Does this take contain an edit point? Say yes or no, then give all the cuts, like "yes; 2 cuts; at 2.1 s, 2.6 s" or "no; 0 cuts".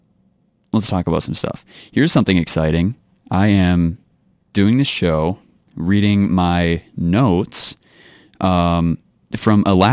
no; 0 cuts